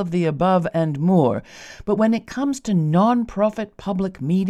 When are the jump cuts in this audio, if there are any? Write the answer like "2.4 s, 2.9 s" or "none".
none